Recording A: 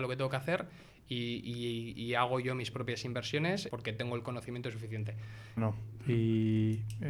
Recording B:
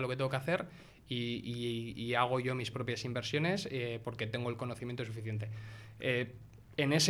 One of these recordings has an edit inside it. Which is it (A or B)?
A